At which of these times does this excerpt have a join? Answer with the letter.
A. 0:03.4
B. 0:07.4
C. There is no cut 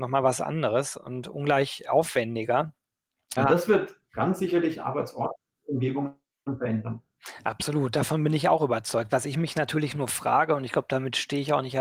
A